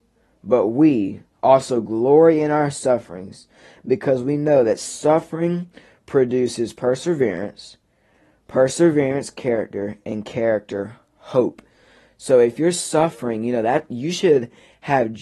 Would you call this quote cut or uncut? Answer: uncut